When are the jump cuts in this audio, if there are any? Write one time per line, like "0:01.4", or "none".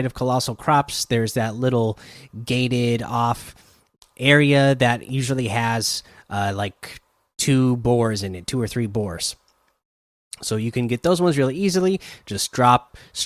none